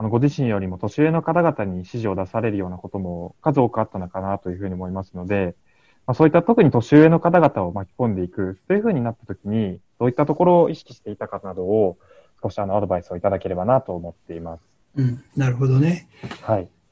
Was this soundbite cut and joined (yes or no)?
no